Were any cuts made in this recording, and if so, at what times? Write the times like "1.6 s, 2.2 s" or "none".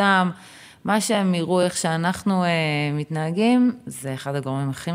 none